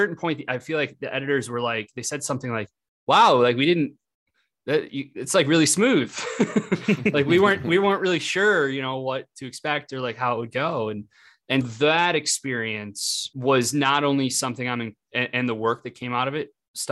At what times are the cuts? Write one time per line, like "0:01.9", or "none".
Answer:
0:11.6